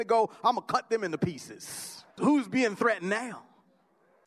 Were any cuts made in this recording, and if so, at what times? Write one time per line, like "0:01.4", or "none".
0:02.1